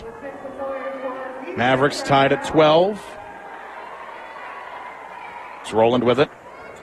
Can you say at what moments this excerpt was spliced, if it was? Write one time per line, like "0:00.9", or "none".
0:05.7